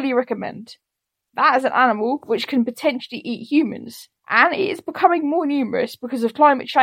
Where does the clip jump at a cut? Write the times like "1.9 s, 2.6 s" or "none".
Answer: 1.2 s, 4.2 s